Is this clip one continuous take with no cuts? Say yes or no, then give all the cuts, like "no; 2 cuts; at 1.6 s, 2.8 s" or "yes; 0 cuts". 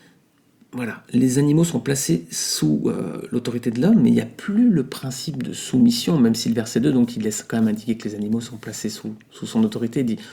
yes; 0 cuts